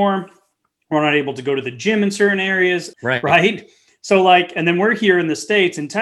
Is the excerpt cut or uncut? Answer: cut